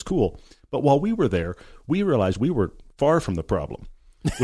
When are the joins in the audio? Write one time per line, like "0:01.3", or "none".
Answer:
none